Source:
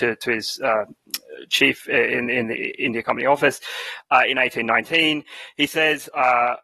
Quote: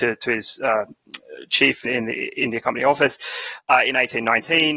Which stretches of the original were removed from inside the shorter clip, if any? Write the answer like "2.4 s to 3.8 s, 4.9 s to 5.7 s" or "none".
1.8 s to 2.3 s